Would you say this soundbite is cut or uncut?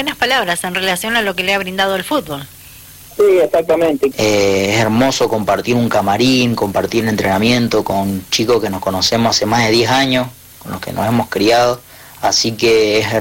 cut